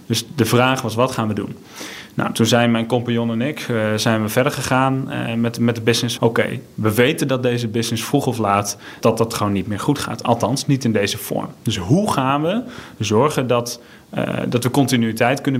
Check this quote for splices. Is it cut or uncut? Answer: cut